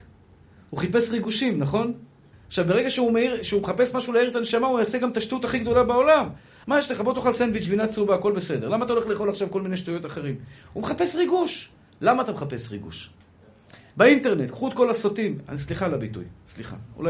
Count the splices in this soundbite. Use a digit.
2